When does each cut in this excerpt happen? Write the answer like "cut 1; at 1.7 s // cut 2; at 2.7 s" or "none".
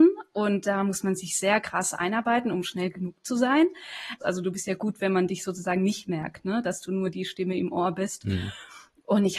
cut 1; at 4.2 s